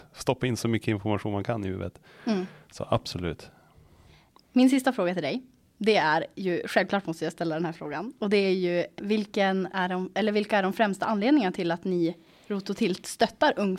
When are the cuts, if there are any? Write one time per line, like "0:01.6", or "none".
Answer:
0:09.0